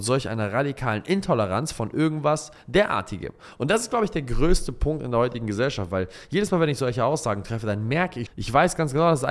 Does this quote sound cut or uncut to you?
cut